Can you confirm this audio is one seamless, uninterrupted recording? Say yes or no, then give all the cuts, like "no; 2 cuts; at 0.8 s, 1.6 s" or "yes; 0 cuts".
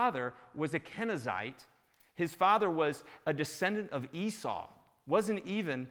no; 1 cut; at 3.2 s